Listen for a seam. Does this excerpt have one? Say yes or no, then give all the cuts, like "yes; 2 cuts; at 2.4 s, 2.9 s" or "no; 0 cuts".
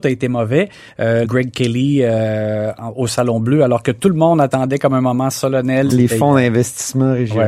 yes; 2 cuts; at 1.2 s, 5.9 s